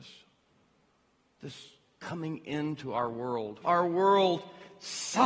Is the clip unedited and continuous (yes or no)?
no